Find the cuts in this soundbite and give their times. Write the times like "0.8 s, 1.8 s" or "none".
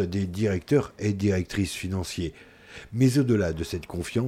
none